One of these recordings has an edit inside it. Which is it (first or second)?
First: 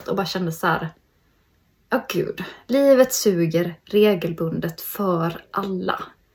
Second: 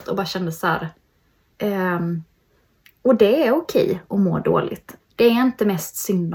second